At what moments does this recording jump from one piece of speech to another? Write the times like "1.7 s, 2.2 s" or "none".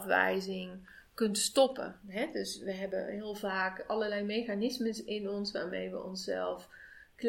none